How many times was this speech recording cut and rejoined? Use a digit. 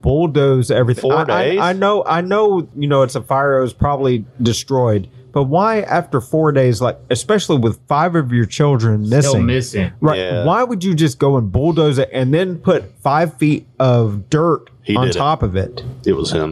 0